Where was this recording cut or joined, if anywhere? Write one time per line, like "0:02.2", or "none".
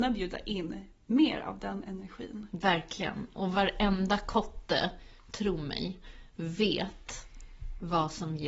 none

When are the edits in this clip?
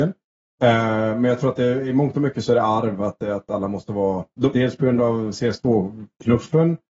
0:04.5

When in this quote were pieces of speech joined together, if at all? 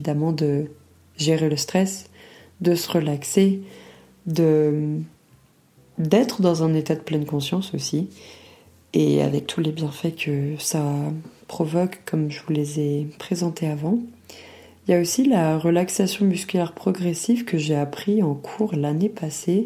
none

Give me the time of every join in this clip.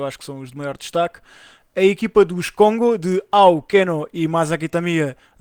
none

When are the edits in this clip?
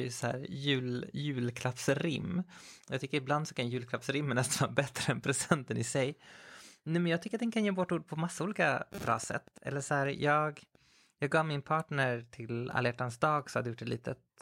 0:02.8

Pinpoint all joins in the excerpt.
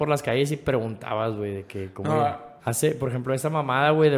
0:02.6

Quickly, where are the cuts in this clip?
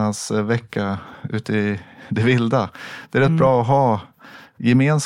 none

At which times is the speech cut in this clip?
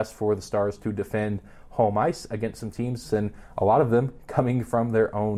0:03.0

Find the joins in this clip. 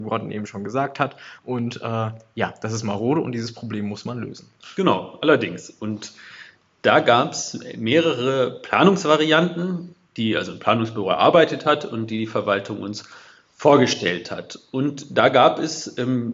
none

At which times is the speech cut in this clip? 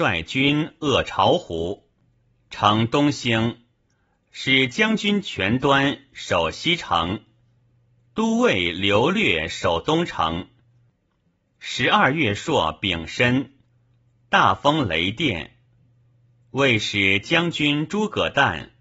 none

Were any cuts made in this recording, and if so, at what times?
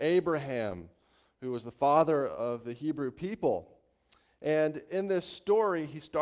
none

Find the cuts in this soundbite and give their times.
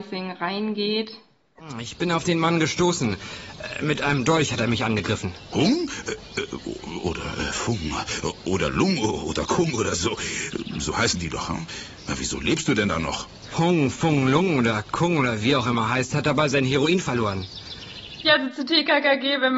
0:05.5
0:13.5
0:18.2

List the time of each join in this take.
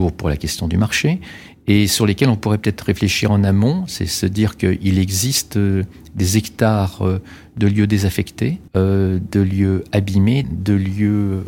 0:08.7
0:10.4

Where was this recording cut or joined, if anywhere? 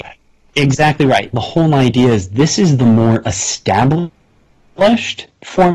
0:01.3

